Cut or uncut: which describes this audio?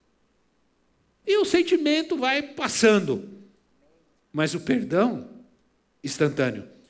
cut